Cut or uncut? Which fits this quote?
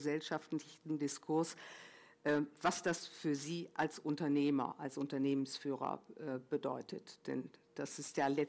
uncut